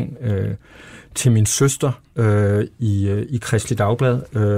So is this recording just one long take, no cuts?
no; 1 cut; at 2.0 s

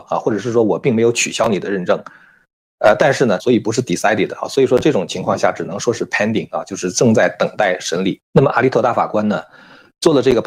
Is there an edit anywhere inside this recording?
yes; 2 cuts; at 3.4 s, 8.2 s

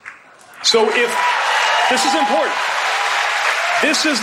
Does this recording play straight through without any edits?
yes; 0 cuts

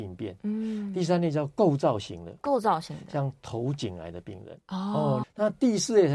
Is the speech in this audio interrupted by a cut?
yes; 1 cut; at 5.2 s

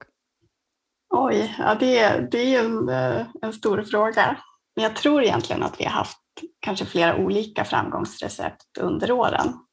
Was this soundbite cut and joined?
no; 0 cuts

